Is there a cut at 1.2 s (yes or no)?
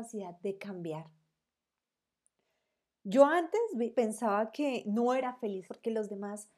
no